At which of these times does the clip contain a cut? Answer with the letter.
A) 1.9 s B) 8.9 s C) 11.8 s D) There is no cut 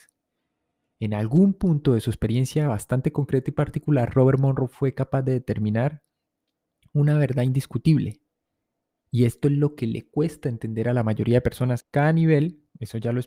C